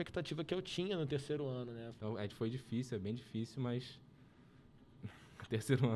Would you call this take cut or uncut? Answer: cut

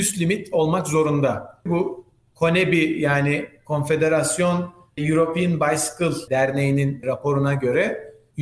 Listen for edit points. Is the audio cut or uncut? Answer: cut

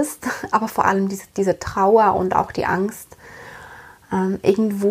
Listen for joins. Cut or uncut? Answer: uncut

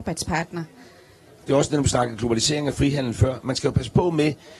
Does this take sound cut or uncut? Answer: cut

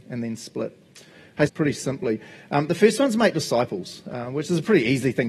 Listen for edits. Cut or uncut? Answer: cut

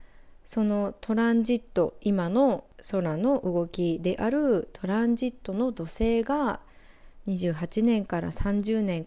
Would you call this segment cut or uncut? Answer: uncut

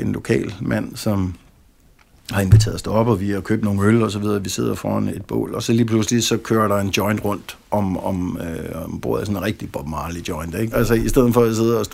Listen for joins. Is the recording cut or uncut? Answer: cut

